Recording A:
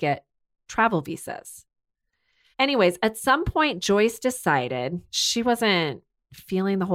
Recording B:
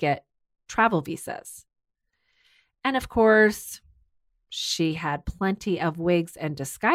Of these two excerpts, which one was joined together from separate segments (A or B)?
A